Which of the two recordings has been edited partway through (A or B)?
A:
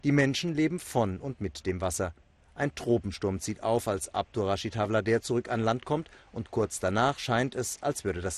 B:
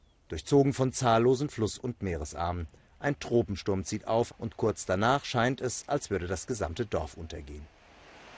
B